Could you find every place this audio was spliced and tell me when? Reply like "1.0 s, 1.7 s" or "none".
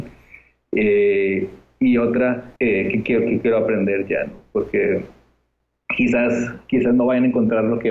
2.6 s